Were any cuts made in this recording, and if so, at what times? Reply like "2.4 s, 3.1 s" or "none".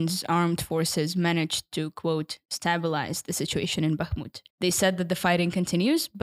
4.5 s